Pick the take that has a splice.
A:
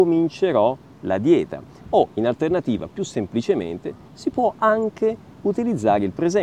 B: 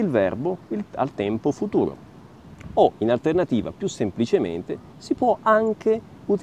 A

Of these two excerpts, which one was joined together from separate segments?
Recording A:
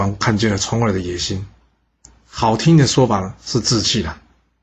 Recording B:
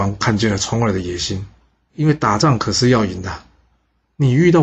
B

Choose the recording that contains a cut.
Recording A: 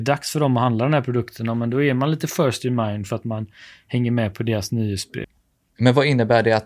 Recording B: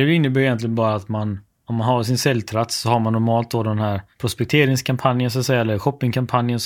A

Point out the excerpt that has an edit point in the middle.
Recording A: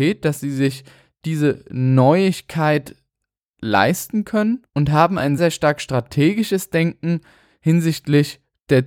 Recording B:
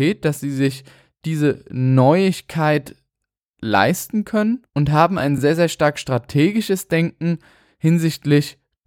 A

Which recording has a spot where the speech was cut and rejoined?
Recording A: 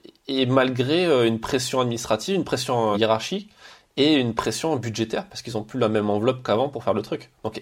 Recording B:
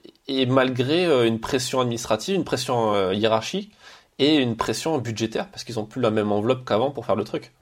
A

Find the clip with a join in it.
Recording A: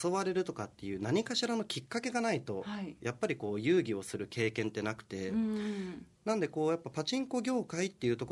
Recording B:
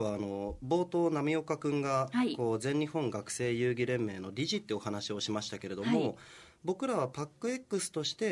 A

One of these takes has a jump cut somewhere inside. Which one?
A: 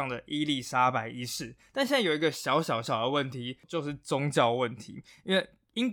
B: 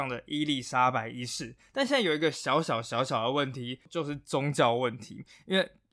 A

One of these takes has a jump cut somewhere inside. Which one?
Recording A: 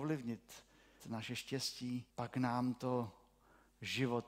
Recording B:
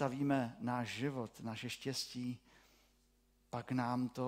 A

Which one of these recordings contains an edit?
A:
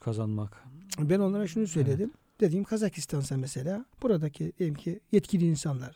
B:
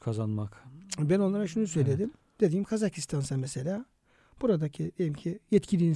A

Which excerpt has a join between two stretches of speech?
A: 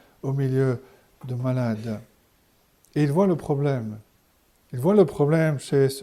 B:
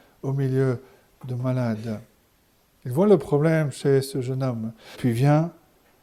B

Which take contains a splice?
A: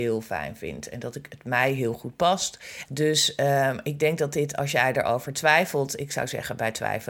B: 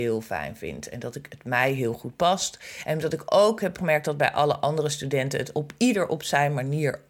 A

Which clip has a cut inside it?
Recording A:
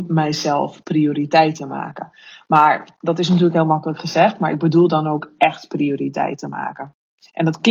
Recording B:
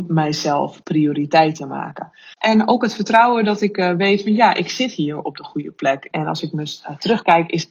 B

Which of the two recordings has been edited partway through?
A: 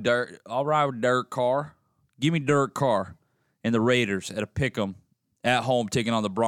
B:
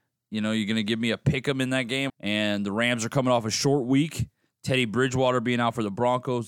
B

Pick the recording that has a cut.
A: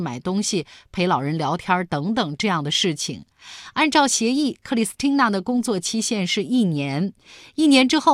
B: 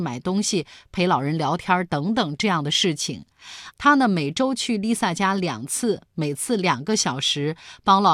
B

